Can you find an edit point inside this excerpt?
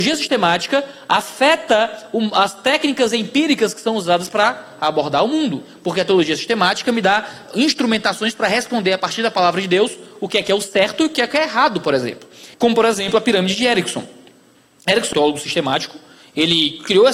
yes; 2 cuts; at 12.5 s, 15.1 s

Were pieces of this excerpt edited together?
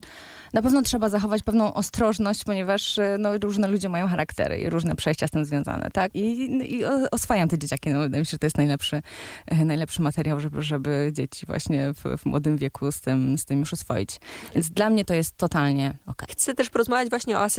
yes; 2 cuts; at 6.1 s, 16.3 s

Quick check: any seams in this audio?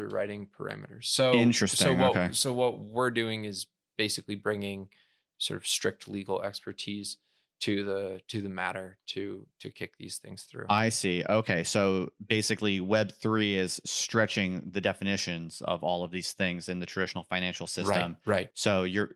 no; 0 cuts

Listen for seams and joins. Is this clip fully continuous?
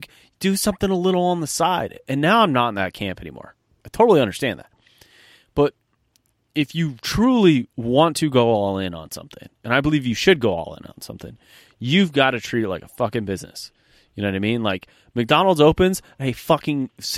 no; 1 cut; at 3.8 s

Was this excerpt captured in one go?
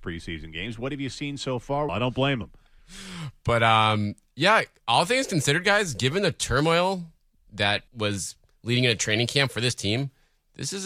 no; 2 cuts; at 1.9 s, 7.9 s

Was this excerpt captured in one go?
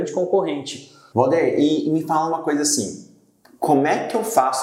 no; 1 cut; at 1.1 s

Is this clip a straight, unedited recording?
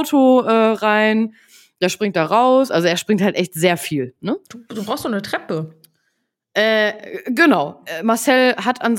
yes; 0 cuts

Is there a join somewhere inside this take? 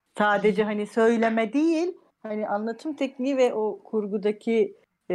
no; 0 cuts

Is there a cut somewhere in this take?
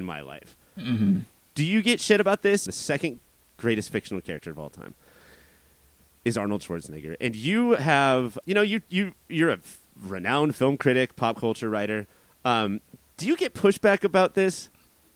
yes; 2 cuts; at 2.7 s, 8.4 s

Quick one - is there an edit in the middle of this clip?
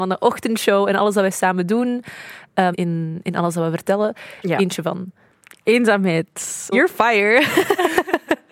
yes; 3 cuts; at 2.7 s, 4.4 s, 6.7 s

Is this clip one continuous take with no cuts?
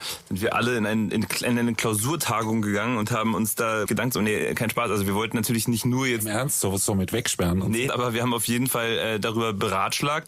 no; 3 cuts; at 3.9 s, 6.9 s, 7.9 s

